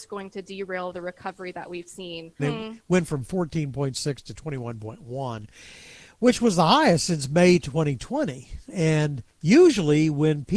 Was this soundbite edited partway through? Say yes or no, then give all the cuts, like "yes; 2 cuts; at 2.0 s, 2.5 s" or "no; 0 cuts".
yes; 2 cuts; at 2.4 s, 9.3 s